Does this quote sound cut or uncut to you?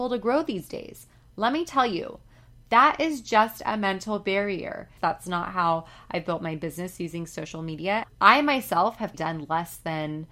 cut